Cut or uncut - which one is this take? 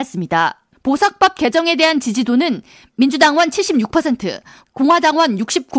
uncut